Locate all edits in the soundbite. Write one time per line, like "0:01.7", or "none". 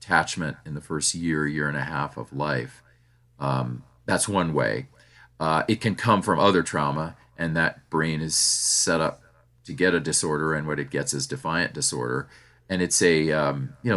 none